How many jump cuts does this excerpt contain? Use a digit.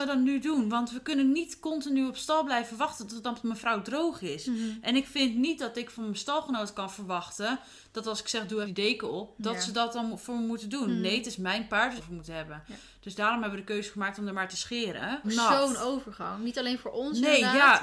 3